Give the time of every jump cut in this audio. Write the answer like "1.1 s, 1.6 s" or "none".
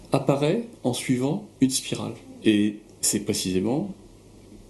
none